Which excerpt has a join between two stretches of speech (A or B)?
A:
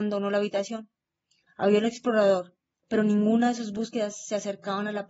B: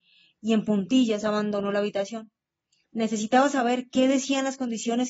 A